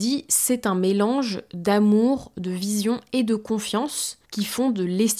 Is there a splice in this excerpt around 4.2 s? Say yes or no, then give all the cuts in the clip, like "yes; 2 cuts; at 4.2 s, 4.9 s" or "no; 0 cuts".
yes; 1 cut; at 4.2 s